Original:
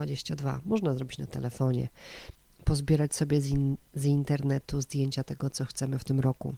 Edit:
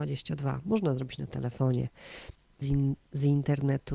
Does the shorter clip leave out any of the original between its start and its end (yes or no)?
yes